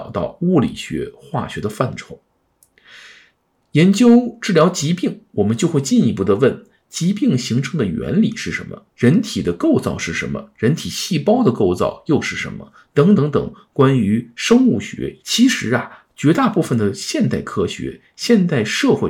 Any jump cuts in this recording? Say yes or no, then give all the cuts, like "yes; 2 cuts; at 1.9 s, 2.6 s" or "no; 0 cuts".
yes; 2 cuts; at 13.2 s, 15.2 s